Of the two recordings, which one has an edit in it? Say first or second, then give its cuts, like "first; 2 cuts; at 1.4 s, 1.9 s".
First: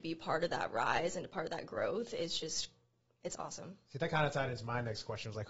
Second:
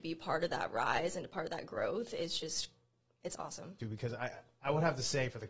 second; 1 cut; at 3.8 s